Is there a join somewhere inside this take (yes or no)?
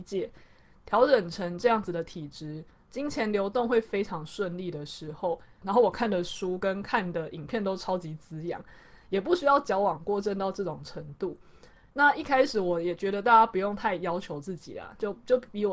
yes